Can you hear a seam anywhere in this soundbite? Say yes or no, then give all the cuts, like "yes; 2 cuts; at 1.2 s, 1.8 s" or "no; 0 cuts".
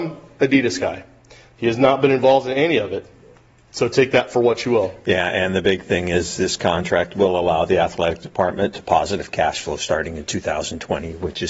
no; 0 cuts